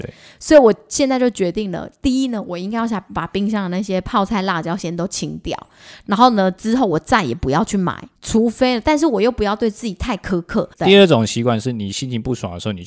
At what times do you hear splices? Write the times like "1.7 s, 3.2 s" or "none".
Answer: 8.2 s, 10.7 s

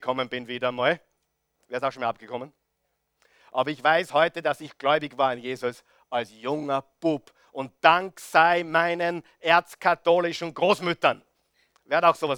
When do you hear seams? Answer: none

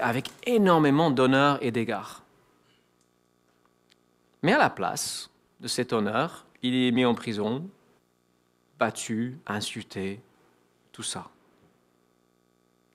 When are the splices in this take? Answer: 6.5 s, 9.4 s

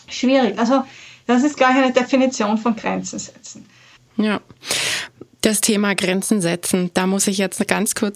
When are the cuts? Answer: 4.0 s

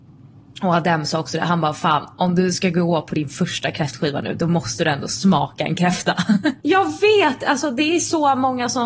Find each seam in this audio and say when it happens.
6.6 s

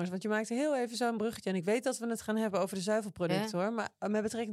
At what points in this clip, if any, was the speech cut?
none

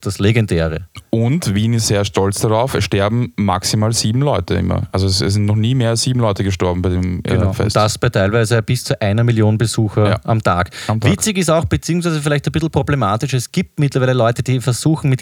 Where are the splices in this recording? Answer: none

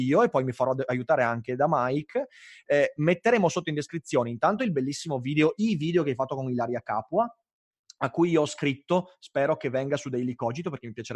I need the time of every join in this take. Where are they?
none

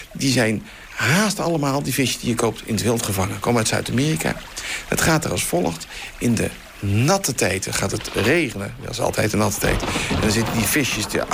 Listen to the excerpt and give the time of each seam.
none

